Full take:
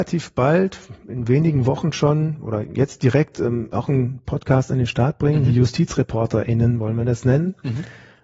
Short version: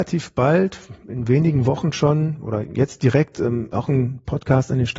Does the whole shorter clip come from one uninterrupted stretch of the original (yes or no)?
yes